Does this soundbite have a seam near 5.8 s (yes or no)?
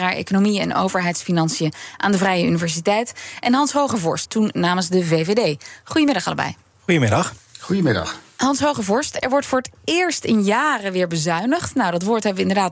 no